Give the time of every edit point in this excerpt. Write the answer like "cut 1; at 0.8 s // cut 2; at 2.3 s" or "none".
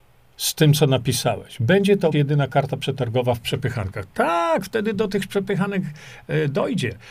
cut 1; at 2.1 s